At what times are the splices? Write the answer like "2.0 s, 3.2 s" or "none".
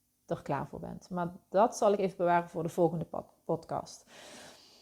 none